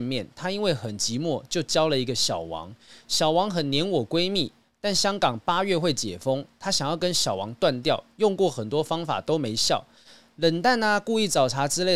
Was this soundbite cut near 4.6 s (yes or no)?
no